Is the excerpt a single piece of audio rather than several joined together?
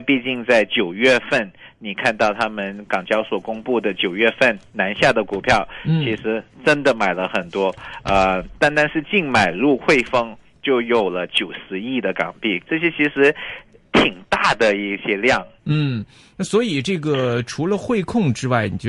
no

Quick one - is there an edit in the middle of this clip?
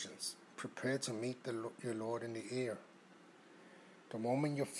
no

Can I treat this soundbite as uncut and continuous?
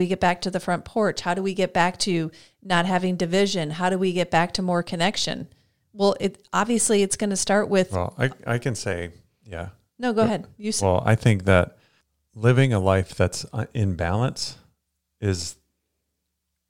yes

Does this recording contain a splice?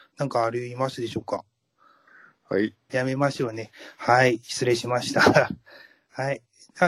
yes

